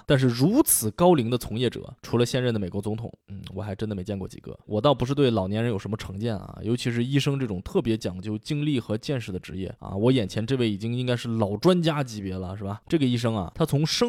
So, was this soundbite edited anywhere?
yes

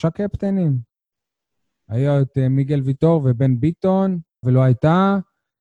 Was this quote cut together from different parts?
yes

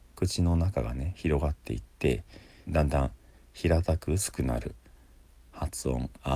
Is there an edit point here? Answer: yes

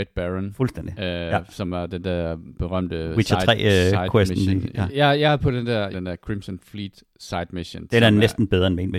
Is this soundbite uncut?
no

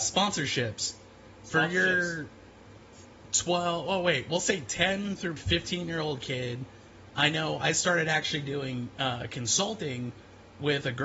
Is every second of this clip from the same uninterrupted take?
no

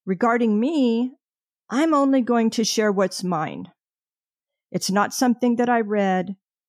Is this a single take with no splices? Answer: yes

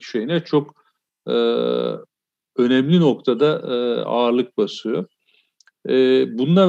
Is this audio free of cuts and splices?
yes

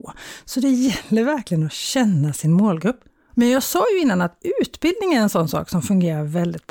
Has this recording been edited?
yes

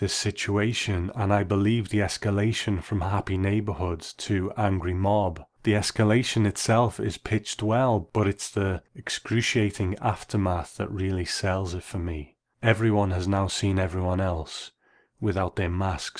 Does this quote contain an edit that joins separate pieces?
no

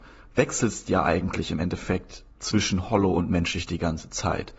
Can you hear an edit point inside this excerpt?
yes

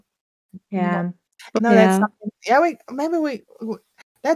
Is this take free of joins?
no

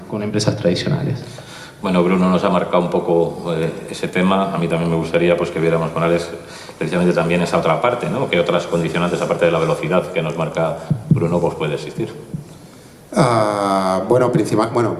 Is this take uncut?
yes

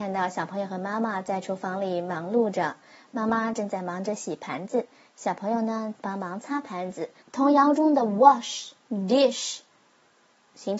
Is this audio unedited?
no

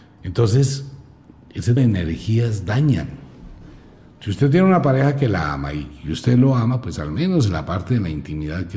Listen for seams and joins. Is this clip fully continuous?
no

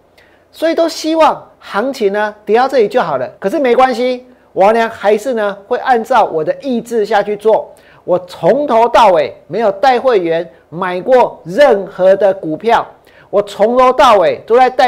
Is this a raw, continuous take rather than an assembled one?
no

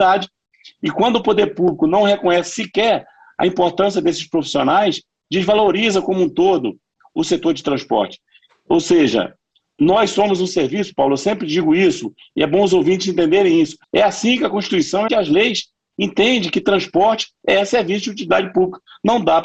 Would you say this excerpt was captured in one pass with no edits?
no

